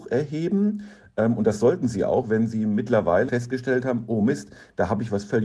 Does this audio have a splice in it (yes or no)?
yes